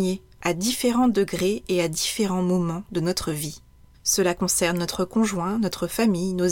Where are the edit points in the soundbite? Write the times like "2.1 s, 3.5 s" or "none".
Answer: 3.9 s